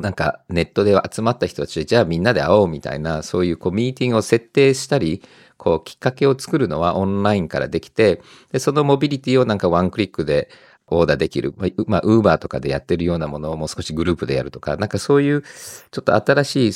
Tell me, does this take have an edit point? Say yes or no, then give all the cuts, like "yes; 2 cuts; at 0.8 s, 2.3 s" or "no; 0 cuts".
no; 0 cuts